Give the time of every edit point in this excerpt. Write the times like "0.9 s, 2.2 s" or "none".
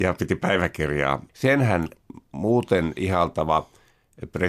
1.3 s